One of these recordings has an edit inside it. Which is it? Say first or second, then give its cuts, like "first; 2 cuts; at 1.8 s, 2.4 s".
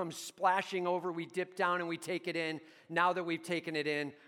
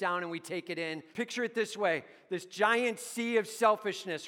second; 1 cut; at 1.1 s